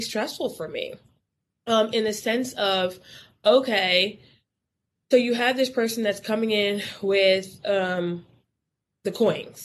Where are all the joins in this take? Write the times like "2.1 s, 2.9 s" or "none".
none